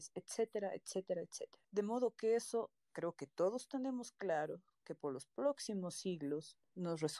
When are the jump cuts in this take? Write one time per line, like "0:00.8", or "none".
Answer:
none